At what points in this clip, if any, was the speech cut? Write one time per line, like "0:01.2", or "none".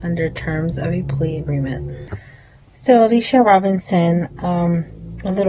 none